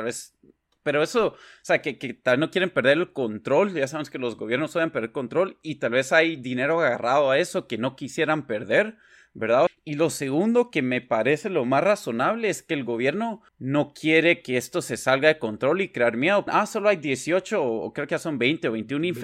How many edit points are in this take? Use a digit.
3